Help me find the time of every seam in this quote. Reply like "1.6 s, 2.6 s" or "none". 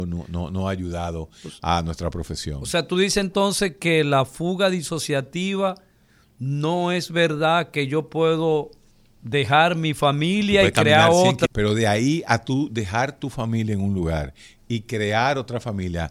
11.5 s